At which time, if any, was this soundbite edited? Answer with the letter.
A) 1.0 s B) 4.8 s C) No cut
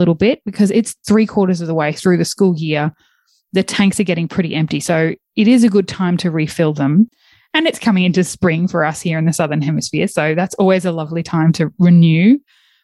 A